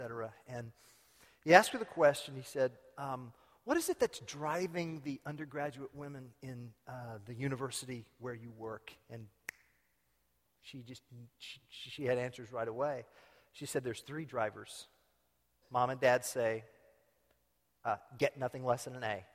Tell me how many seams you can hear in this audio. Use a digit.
1